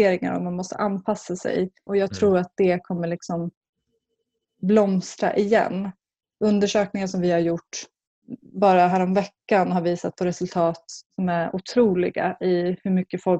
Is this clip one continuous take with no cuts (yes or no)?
no